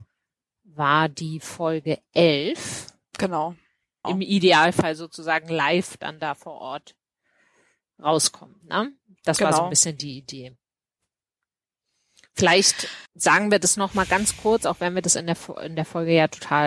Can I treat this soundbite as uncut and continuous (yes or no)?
no